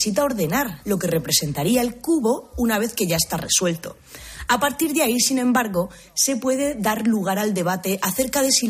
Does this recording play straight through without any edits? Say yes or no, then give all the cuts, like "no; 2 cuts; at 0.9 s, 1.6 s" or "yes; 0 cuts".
yes; 0 cuts